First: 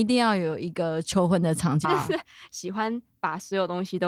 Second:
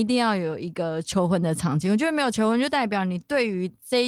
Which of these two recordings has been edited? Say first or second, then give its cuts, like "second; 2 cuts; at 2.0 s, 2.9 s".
first; 1 cut; at 1.8 s